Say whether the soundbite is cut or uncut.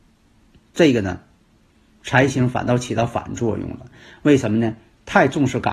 uncut